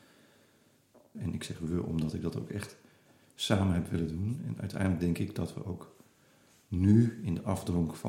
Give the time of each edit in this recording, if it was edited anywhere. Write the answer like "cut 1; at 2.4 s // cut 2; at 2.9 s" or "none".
cut 1; at 1.1 s